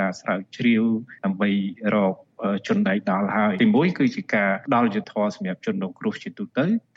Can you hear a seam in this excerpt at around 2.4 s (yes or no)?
no